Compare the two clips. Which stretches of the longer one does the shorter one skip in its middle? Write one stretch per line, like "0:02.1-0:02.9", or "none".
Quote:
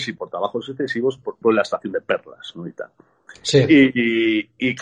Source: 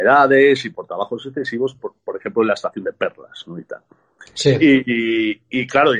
0:02.0-0:02.3